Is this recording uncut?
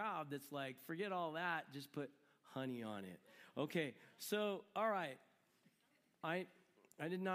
yes; 0 cuts

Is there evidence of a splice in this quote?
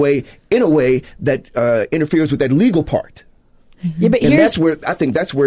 no; 0 cuts

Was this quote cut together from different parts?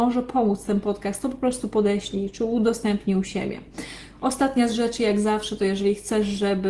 yes; 1 cut; at 4.1 s

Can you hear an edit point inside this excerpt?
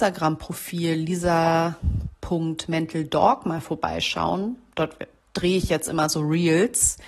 no; 0 cuts

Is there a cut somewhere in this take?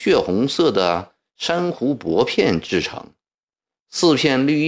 no; 0 cuts

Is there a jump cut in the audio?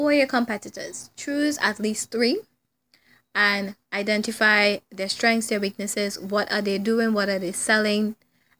no; 0 cuts

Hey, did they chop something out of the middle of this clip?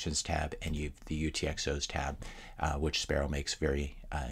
no; 0 cuts

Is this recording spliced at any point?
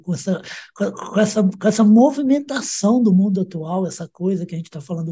no; 0 cuts

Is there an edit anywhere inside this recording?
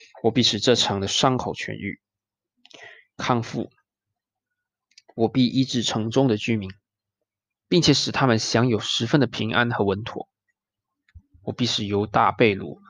no; 0 cuts

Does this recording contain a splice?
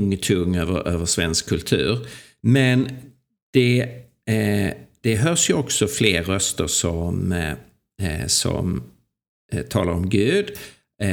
no; 0 cuts

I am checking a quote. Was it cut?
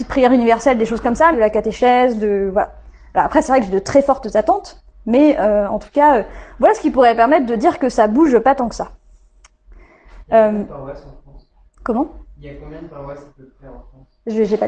yes; 1 cut; at 1.3 s

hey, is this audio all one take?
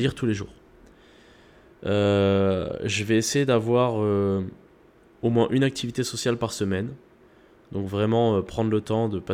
yes; 0 cuts

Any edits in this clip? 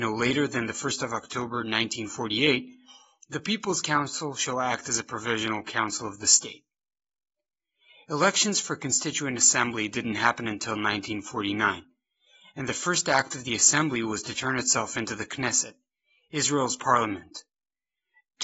no; 0 cuts

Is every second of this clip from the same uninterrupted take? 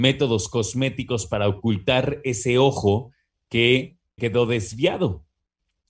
no; 1 cut; at 4.2 s

